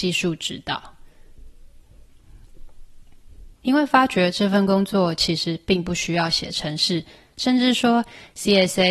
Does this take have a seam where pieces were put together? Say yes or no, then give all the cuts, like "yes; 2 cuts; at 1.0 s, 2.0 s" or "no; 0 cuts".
yes; 1 cut; at 3.6 s